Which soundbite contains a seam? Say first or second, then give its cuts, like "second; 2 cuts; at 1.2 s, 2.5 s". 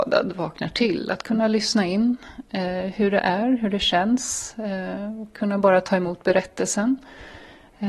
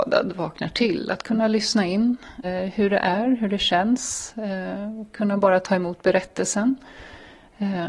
second; 1 cut; at 2.4 s